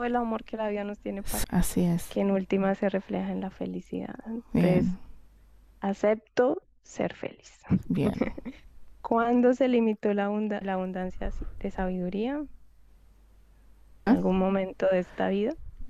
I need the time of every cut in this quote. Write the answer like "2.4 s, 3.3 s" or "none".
1.4 s, 10.6 s, 14.1 s